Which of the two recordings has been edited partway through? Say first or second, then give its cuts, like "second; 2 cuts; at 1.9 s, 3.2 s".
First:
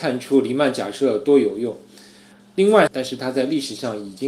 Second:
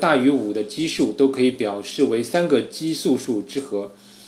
first; 1 cut; at 2.9 s